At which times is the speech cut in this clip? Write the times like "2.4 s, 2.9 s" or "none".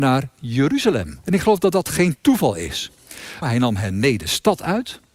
1.2 s, 3.4 s